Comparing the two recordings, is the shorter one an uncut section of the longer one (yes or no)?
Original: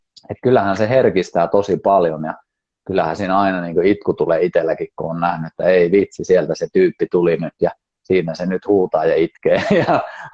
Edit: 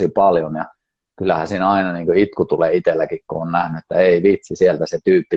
yes